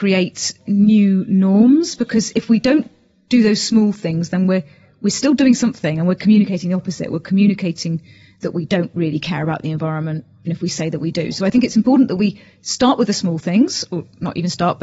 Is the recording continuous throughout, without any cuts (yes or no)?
no